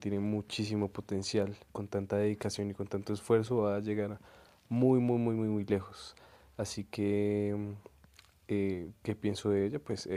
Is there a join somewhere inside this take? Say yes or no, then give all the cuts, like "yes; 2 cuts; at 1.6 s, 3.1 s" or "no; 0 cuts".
yes; 1 cut; at 1.7 s